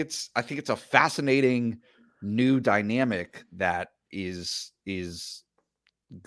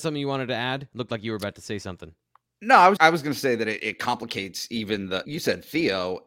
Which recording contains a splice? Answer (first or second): second